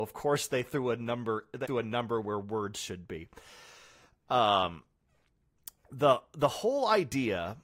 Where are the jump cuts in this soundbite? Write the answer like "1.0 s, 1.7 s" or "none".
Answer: 1.6 s